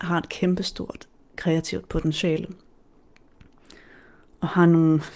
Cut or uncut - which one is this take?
uncut